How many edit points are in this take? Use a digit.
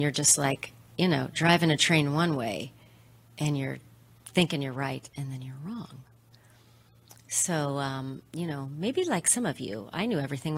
0